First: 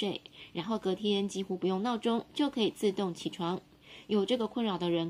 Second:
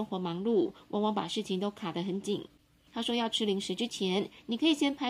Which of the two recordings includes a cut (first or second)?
second